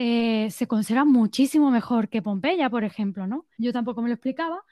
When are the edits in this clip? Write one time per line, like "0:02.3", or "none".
0:03.6